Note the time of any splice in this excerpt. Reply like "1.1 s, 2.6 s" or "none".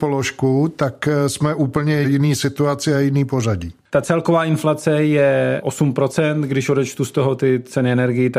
3.9 s

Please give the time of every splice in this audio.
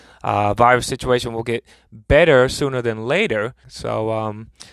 3.6 s

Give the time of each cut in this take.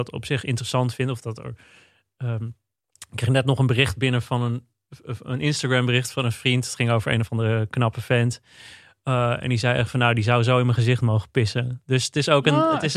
none

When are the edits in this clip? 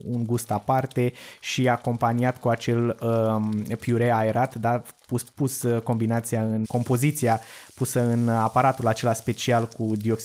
5.3 s, 6.6 s

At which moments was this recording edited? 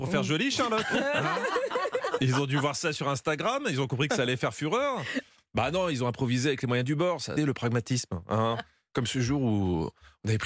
7.4 s

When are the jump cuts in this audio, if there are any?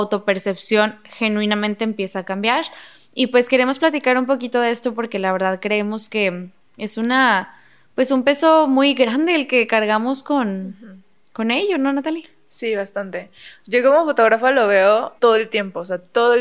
15.2 s

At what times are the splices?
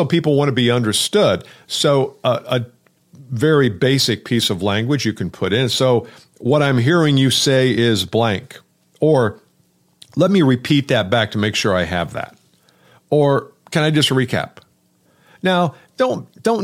none

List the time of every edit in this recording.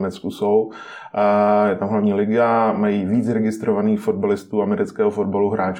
none

